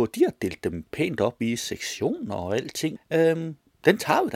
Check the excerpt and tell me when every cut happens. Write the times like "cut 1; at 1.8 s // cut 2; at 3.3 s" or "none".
cut 1; at 3.0 s